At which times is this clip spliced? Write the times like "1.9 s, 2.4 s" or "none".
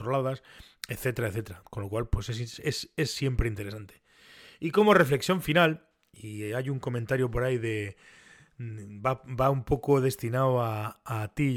none